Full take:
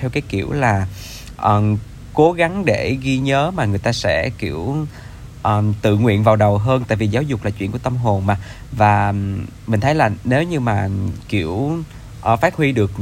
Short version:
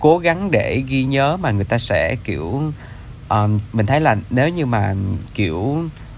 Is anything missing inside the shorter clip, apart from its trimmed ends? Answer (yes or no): yes